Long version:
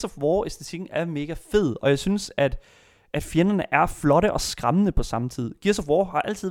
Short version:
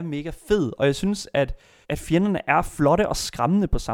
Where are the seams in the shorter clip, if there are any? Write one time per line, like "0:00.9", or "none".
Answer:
0:01.8